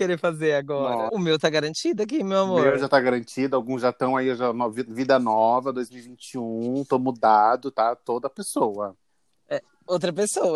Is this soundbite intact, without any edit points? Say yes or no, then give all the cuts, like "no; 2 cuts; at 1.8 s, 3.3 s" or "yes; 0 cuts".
no; 1 cut; at 1.1 s